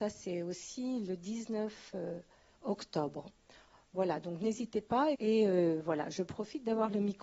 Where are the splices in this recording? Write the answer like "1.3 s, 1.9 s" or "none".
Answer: 5.1 s